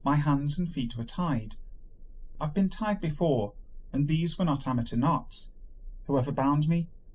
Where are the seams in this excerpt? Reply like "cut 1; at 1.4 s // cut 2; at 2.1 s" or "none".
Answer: none